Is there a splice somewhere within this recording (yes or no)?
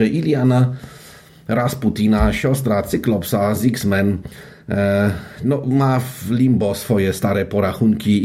no